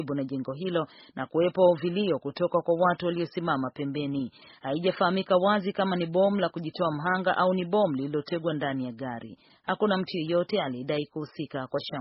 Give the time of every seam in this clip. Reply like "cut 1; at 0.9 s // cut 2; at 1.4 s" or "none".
none